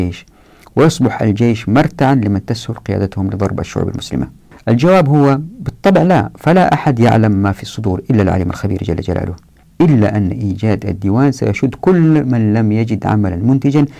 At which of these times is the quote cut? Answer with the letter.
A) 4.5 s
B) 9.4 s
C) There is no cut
A